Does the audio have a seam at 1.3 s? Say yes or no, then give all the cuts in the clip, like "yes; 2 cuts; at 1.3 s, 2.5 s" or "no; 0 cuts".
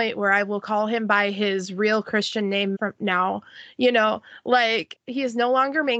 no; 2 cuts; at 2.7 s, 4.9 s